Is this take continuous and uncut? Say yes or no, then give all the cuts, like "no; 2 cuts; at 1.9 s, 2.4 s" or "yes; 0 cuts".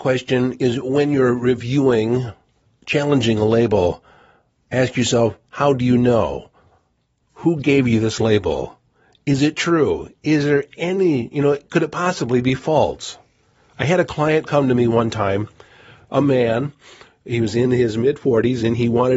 yes; 0 cuts